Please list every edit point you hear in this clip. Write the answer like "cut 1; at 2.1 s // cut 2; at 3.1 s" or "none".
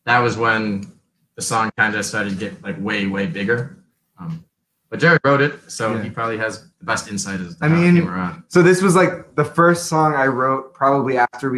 none